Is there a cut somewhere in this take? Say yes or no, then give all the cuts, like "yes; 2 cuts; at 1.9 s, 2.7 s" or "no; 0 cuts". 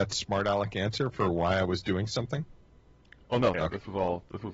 yes; 1 cut; at 3.5 s